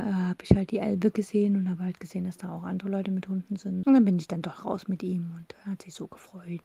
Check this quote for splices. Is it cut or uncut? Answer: cut